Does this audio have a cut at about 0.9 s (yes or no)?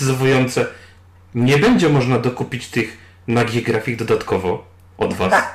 no